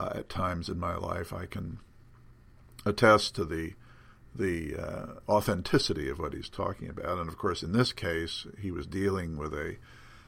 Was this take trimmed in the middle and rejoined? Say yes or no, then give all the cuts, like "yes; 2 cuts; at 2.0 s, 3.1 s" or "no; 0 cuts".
no; 0 cuts